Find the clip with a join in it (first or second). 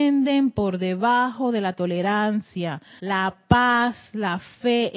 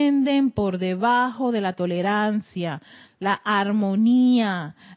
first